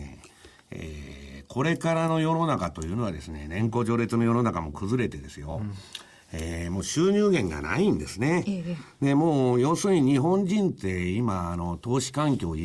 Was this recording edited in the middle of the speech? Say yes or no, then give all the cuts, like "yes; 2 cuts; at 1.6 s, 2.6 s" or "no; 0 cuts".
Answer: no; 0 cuts